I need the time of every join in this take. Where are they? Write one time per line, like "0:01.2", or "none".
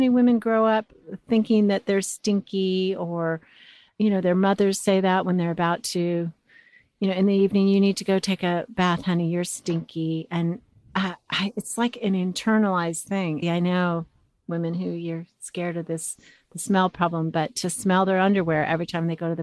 0:13.4